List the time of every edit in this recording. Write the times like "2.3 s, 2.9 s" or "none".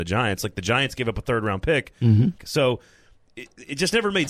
2.4 s